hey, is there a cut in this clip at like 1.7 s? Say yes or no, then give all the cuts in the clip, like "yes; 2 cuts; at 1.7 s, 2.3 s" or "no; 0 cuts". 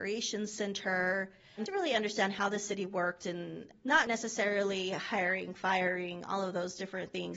yes; 2 cuts; at 1.7 s, 4.1 s